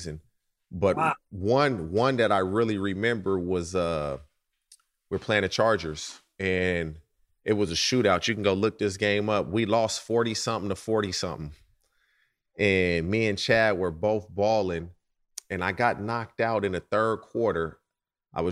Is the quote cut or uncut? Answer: uncut